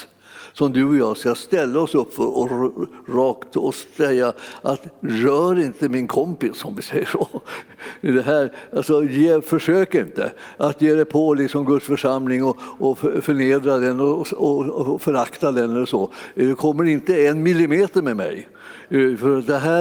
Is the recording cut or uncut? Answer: uncut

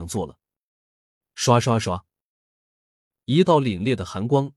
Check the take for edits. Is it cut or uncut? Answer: cut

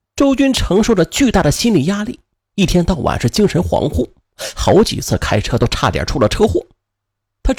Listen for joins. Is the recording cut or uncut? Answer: uncut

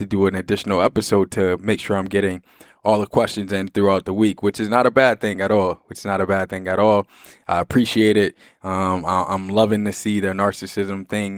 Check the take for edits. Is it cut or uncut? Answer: uncut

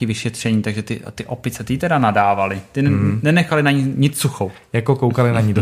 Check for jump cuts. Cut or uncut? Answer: uncut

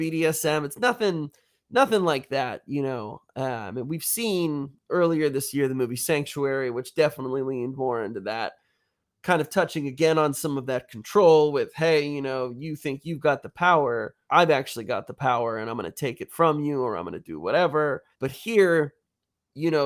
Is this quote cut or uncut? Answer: cut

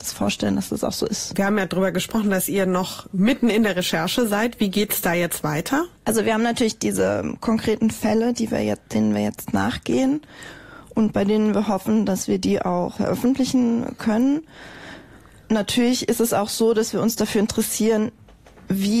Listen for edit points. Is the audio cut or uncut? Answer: uncut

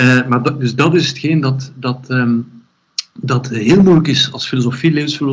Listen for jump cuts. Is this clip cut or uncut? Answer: uncut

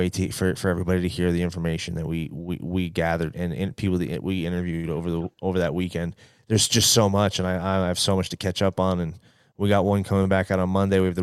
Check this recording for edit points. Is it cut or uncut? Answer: cut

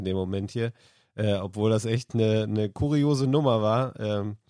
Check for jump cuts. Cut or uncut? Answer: uncut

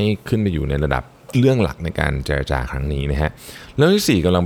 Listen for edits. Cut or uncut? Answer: cut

